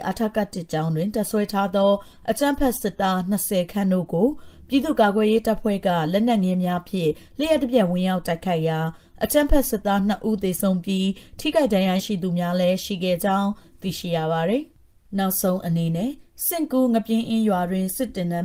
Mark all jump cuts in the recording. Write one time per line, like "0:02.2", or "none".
0:12.0

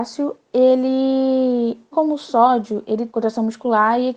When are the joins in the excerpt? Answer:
0:01.9
0:03.1

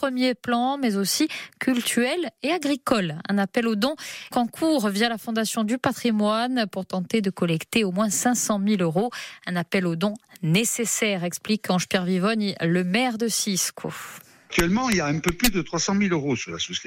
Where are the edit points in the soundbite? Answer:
0:04.3

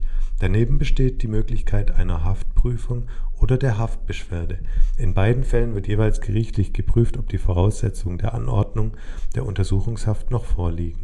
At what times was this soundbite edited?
none

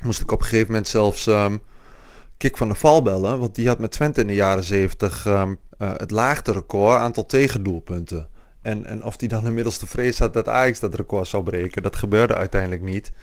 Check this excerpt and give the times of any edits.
0:05.7

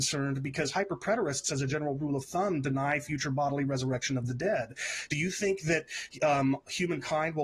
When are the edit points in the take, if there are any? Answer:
none

